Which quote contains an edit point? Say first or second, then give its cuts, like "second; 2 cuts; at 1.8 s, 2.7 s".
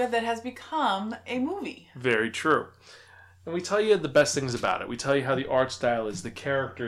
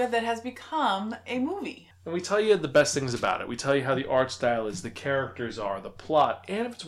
second; 1 cut; at 1.9 s